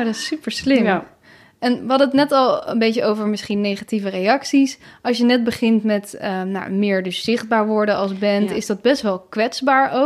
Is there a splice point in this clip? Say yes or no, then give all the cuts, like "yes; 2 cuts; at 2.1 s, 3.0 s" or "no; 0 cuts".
no; 0 cuts